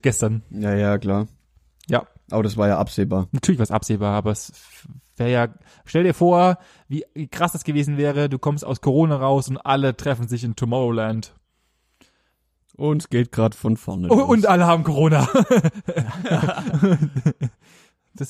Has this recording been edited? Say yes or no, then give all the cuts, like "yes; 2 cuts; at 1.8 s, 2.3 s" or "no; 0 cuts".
no; 0 cuts